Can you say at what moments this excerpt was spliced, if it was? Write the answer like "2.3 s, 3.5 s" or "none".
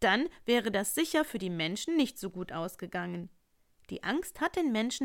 none

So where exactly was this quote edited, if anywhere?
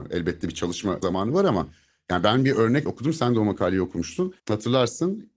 4.4 s

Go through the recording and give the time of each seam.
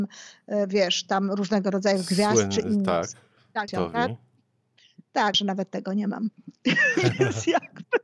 3.7 s, 5.3 s

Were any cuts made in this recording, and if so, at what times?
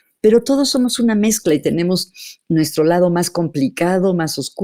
none

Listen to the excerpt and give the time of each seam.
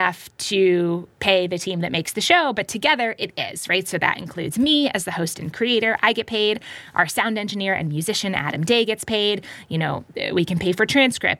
none

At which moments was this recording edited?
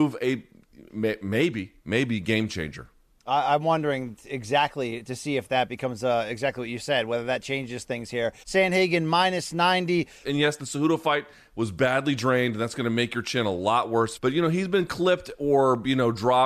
8.4 s, 10.2 s, 14.2 s

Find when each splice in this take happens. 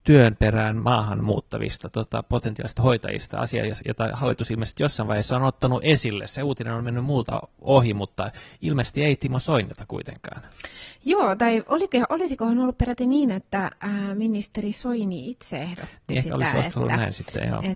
none

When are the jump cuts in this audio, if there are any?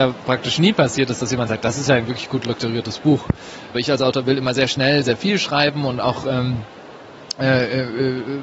3.7 s

